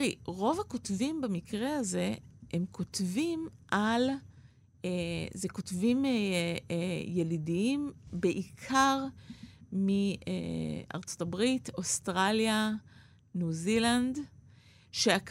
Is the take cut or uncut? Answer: uncut